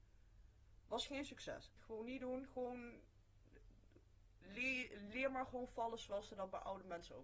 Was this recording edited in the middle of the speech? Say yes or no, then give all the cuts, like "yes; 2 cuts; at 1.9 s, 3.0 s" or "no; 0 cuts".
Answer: yes; 1 cut; at 1.8 s